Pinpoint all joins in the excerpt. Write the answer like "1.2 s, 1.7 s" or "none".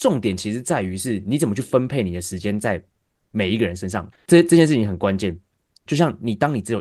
4.1 s, 5.9 s